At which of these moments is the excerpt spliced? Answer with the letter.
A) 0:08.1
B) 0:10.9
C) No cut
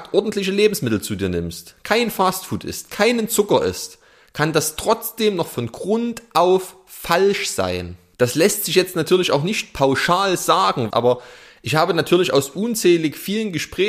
B